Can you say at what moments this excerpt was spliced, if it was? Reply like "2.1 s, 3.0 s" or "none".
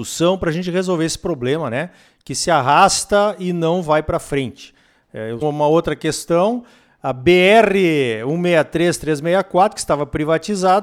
5.4 s